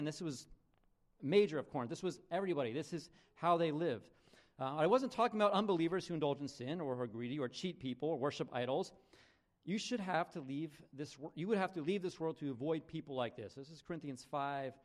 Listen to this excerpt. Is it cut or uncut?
uncut